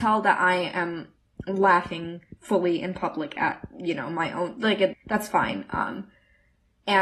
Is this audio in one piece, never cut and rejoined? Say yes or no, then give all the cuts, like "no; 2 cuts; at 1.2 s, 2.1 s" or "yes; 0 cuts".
no; 1 cut; at 4.9 s